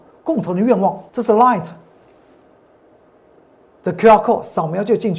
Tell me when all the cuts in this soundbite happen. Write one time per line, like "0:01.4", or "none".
0:01.1

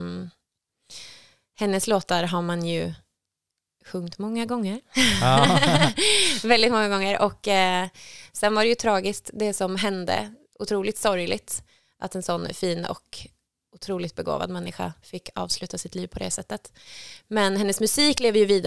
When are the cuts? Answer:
none

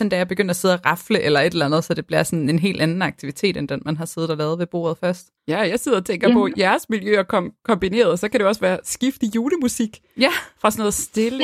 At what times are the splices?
0:05.4

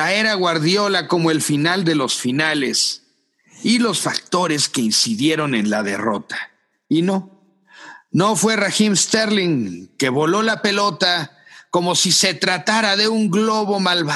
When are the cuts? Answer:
none

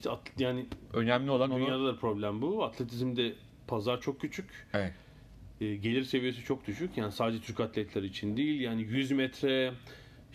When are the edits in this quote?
none

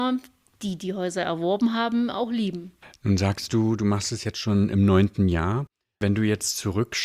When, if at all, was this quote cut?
none

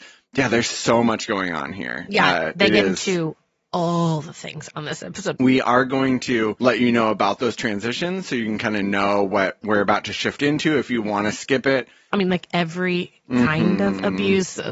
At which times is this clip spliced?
0:05.3
0:12.1

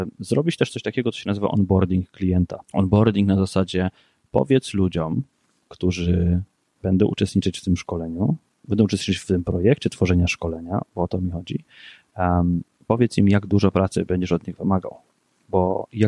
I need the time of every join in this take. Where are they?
0:02.6
0:08.6

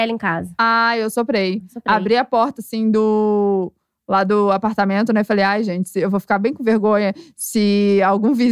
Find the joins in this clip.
none

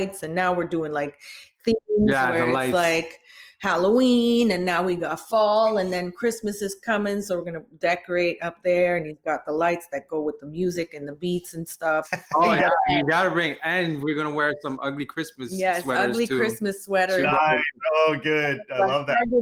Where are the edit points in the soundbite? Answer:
0:12.0

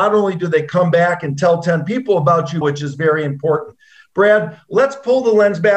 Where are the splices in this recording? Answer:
0:02.6

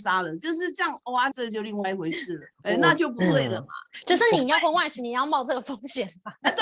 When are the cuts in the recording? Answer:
0:01.3
0:02.5

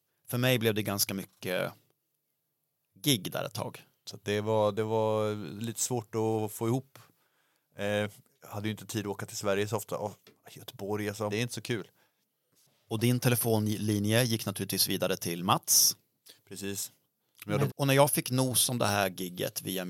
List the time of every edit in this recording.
0:04.0
0:11.3
0:17.7

